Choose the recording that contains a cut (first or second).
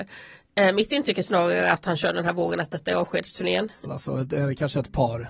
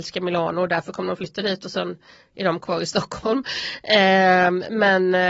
first